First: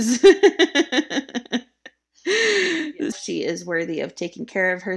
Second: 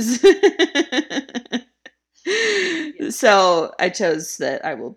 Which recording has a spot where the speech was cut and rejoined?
first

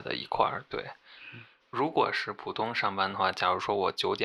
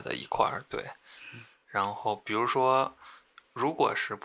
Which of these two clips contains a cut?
first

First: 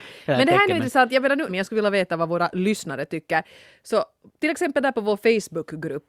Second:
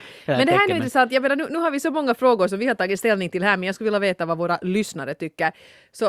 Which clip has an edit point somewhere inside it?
first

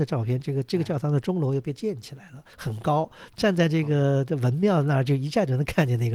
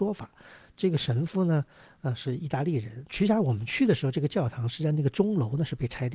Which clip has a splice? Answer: second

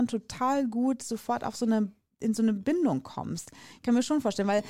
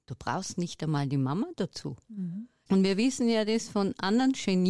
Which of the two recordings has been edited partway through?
second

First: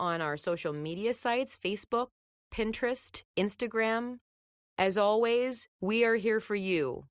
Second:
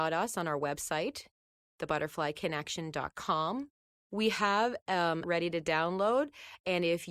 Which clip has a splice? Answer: second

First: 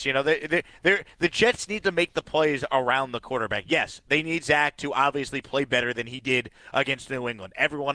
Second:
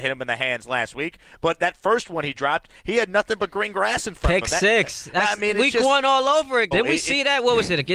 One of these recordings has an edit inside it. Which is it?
second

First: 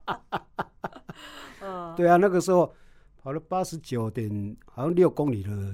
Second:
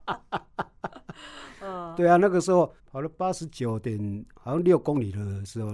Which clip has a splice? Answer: second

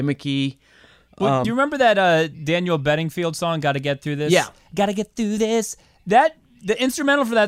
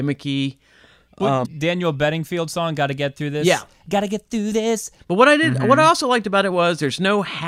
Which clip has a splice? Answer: second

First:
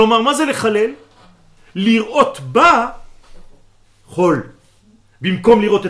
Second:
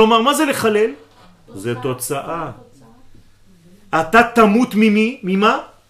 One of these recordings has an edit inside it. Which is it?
second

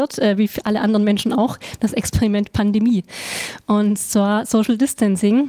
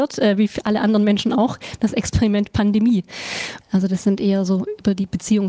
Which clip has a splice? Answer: second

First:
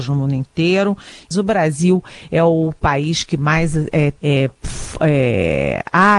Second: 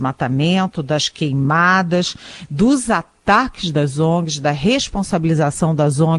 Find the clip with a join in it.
first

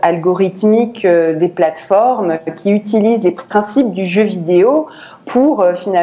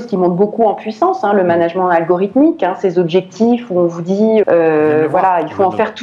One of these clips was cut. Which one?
second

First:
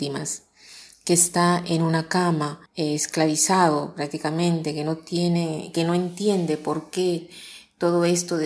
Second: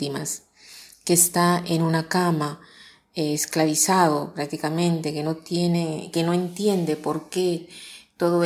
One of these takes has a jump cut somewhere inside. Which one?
first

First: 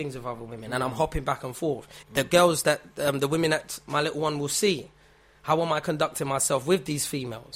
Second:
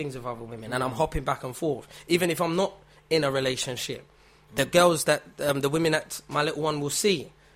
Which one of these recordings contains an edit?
first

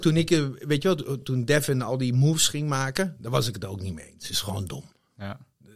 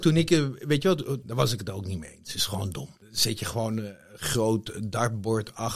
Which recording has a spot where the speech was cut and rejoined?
second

